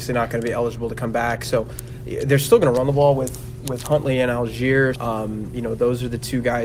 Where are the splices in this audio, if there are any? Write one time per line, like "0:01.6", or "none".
0:04.9